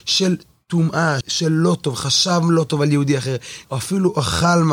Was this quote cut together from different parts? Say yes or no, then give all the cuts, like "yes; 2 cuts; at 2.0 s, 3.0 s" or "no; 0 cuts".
yes; 2 cuts; at 1.2 s, 3.6 s